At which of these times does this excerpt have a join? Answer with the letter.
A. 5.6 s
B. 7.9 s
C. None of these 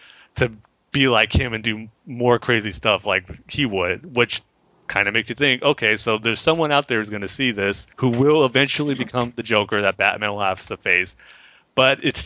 B